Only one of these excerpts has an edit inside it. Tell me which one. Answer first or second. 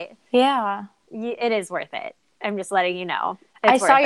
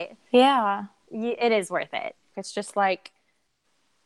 second